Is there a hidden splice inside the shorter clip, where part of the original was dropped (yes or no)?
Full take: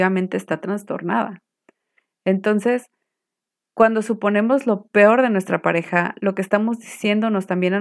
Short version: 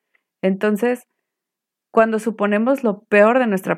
no